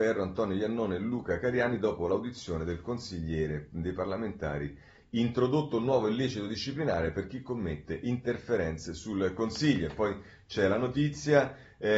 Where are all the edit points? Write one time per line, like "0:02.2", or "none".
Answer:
0:05.0